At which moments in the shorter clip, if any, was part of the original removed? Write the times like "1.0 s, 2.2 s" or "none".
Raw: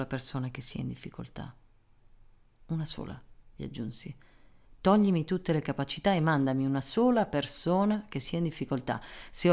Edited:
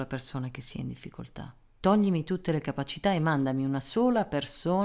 1.8 s